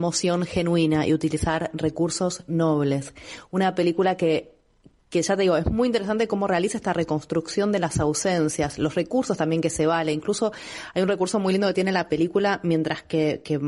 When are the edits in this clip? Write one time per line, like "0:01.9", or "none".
none